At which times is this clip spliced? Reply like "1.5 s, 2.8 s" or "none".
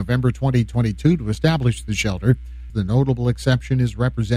2.7 s

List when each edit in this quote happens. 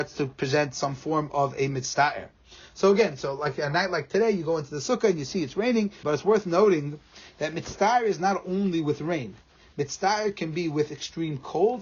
6.0 s

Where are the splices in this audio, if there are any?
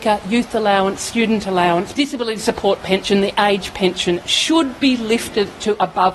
1.9 s

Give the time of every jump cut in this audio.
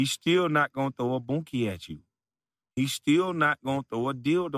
none

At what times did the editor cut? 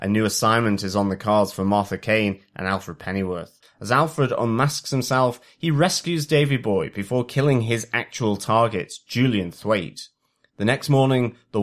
3.6 s

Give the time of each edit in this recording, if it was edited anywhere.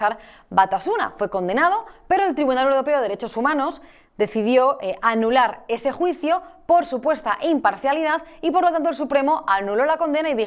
none

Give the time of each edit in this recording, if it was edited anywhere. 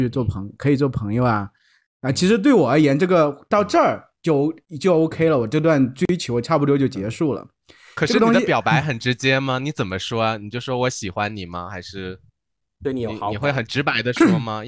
none

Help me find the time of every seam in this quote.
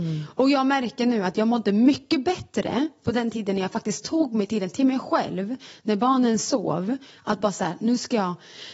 none

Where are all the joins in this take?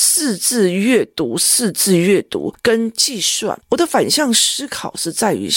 3.6 s

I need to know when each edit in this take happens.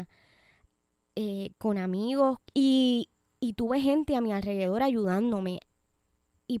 2.4 s

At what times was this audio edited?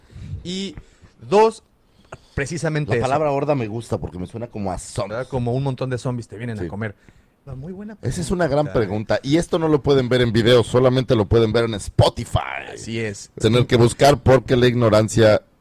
5.1 s, 7.5 s, 13.4 s

